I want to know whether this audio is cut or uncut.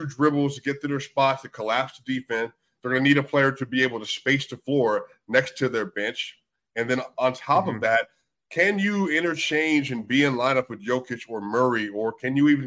uncut